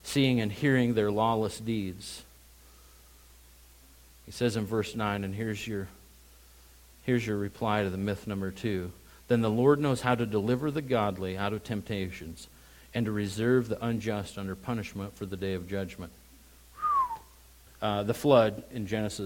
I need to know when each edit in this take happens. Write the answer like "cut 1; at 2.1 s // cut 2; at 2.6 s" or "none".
cut 1; at 17.7 s